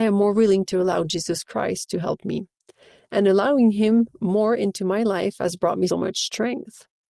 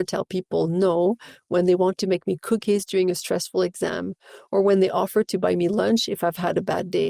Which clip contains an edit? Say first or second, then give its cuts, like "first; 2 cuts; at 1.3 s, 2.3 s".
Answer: first; 1 cut; at 5.9 s